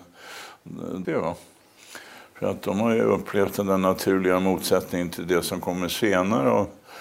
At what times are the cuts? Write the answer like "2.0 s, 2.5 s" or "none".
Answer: 1.0 s